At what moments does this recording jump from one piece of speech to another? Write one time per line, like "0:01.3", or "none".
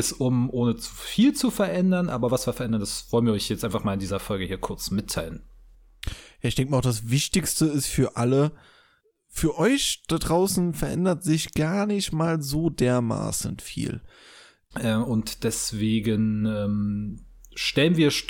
0:14.7